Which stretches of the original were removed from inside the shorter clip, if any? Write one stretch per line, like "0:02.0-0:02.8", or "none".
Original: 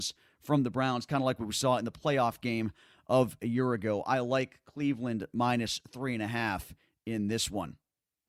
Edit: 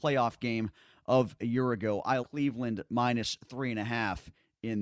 0:04.2-0:04.6